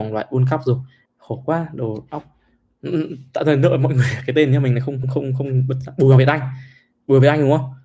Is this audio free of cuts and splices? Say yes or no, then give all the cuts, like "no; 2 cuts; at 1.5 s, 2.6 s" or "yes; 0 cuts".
no; 2 cuts; at 1.1 s, 5.0 s